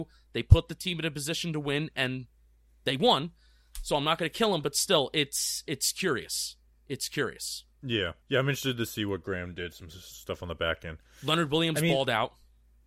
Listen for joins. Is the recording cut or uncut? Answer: cut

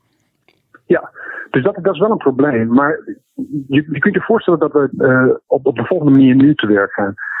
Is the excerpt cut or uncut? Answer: cut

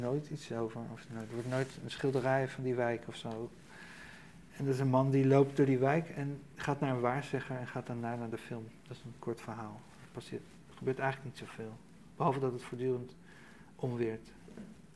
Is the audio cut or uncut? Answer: uncut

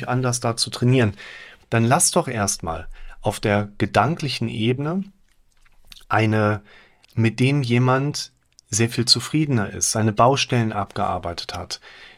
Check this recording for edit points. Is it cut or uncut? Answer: cut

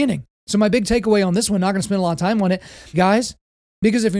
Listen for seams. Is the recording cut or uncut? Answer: cut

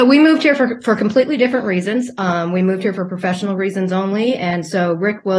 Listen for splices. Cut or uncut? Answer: uncut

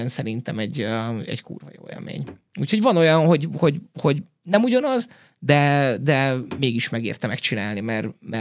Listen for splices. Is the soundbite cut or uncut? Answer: uncut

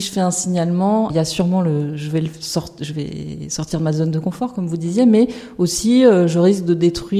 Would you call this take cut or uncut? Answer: cut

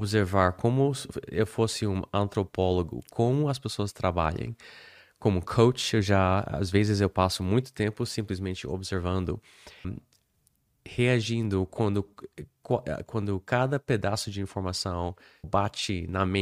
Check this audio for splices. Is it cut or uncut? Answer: cut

